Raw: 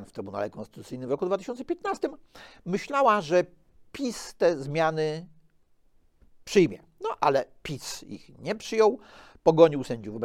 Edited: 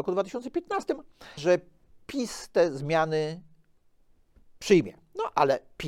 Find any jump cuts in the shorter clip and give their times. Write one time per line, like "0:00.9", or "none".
0:01.4